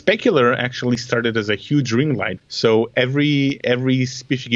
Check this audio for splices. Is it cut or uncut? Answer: cut